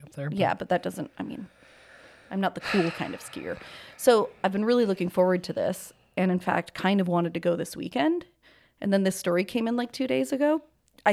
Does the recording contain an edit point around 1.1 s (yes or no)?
no